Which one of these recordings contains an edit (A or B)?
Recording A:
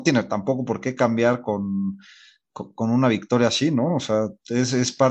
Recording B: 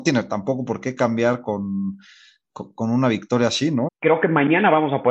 B